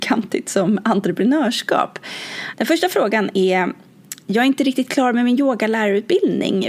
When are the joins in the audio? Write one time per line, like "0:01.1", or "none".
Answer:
0:02.5